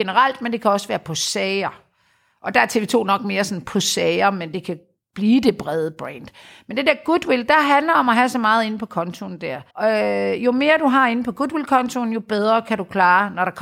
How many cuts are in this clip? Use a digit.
1